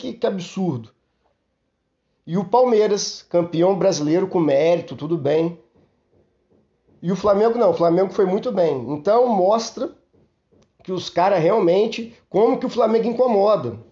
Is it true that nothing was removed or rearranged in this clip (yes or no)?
yes